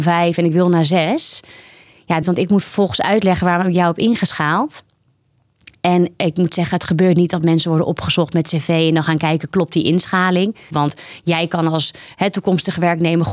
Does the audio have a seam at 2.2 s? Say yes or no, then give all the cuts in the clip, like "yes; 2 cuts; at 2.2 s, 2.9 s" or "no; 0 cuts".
yes; 2 cuts; at 2.2 s, 10.7 s